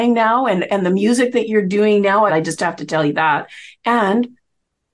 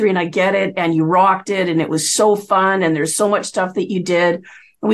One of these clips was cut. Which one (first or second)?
first